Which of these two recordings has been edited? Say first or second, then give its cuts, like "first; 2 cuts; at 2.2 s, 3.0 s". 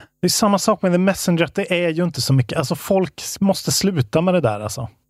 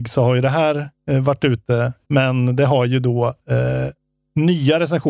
second; 1 cut; at 2.0 s